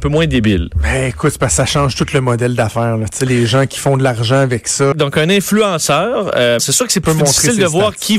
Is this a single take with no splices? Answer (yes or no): no